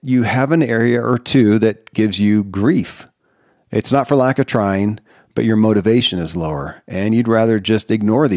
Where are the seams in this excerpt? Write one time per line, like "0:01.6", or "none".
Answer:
none